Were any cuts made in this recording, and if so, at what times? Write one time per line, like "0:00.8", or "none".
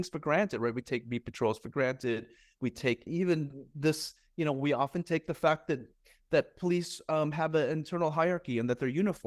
0:03.1